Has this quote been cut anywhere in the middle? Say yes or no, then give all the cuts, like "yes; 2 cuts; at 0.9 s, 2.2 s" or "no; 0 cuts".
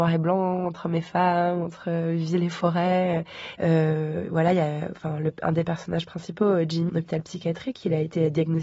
yes; 2 cuts; at 3.5 s, 6.9 s